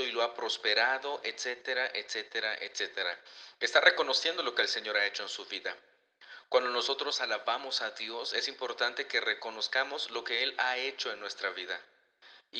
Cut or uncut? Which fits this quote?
uncut